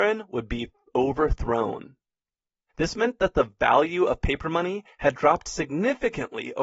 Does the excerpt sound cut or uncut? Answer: cut